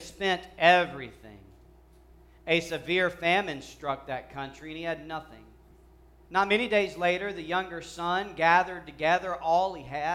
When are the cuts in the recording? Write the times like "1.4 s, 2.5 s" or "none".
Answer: 6.3 s